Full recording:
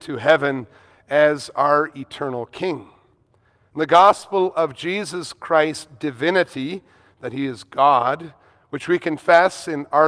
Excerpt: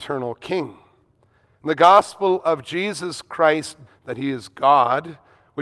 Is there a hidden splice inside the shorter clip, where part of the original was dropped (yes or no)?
yes